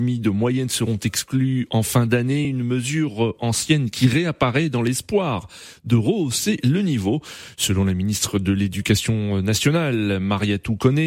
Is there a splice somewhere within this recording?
no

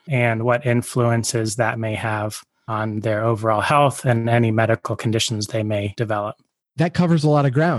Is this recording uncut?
yes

